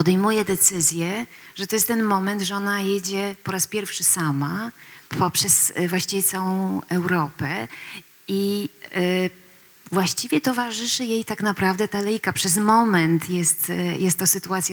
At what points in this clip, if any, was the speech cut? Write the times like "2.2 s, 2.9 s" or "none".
5.1 s